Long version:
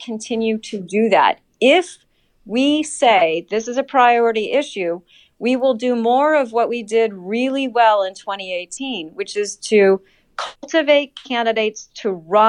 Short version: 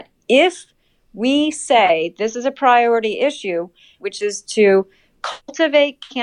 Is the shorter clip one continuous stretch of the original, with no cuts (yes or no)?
no